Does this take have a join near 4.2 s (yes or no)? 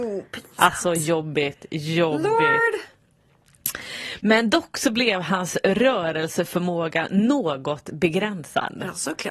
no